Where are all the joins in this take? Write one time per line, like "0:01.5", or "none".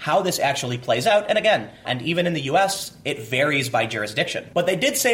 0:01.9